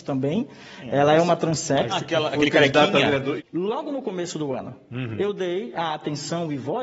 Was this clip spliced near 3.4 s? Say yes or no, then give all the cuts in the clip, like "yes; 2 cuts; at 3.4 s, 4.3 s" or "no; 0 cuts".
yes; 2 cuts; at 1.9 s, 3.4 s